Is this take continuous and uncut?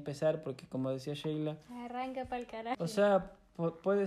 no; 1 cut; at 2.7 s

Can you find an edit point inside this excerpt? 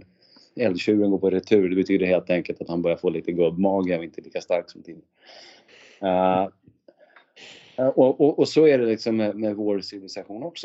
no; 0 cuts

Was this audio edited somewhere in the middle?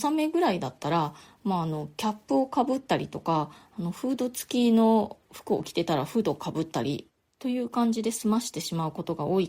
no; 0 cuts

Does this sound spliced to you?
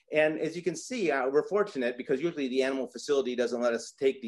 no; 0 cuts

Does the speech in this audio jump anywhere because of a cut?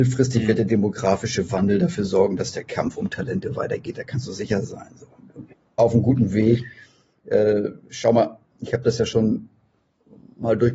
yes; 1 cut; at 5.8 s

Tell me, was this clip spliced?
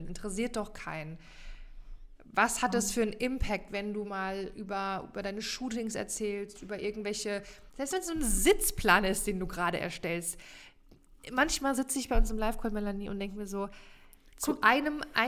no; 0 cuts

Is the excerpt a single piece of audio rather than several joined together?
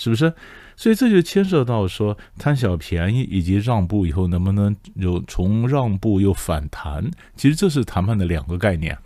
yes; 0 cuts

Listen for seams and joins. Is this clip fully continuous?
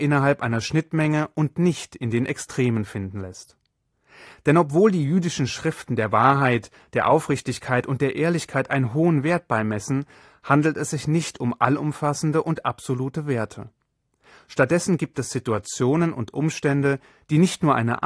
yes; 0 cuts

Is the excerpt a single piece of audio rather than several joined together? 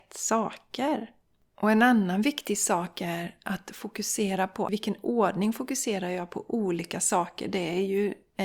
yes; 0 cuts

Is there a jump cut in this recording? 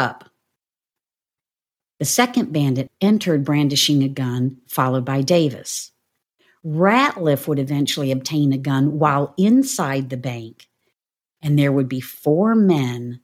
yes; 1 cut; at 2.9 s

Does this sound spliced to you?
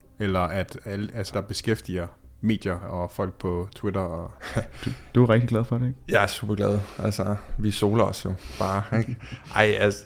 yes; 1 cut; at 1.3 s

